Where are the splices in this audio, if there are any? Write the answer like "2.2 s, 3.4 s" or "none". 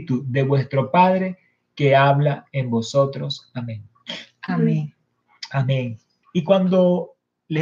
6.2 s